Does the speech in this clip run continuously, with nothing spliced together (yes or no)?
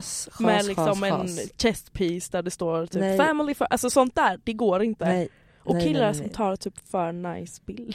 yes